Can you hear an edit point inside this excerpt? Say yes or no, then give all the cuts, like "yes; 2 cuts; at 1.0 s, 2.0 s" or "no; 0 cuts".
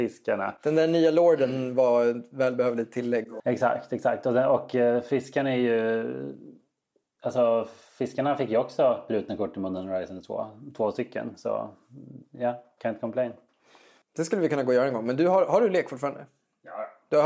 yes; 2 cuts; at 3.4 s, 14.0 s